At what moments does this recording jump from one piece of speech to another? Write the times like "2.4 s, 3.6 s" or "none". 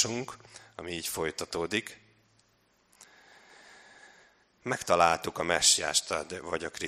none